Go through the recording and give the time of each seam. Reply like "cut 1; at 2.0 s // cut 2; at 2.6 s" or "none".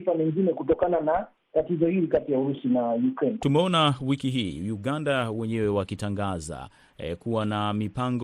cut 1; at 3.4 s